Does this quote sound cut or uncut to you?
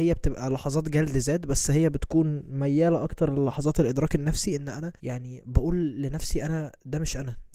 cut